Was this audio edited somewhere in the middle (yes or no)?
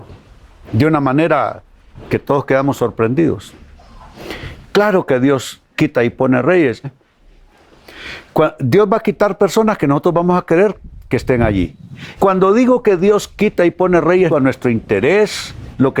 yes